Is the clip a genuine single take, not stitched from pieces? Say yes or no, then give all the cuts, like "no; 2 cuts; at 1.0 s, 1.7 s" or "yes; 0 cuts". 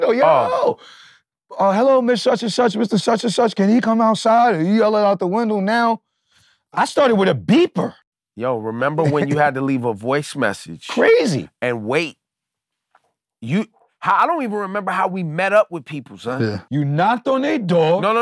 yes; 0 cuts